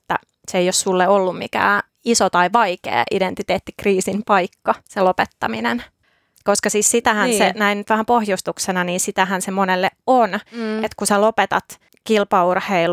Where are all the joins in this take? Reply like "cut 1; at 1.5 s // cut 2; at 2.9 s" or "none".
cut 1; at 4.8 s